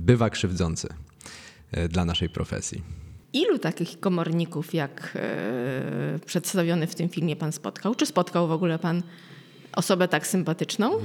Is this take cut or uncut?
cut